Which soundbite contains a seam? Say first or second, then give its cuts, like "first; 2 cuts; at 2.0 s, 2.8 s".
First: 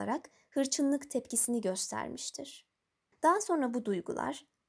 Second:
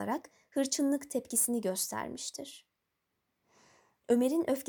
first; 1 cut; at 3.1 s